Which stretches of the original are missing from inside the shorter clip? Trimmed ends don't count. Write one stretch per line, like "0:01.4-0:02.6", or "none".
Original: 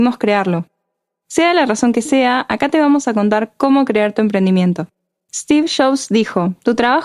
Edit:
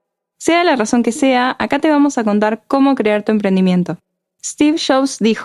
none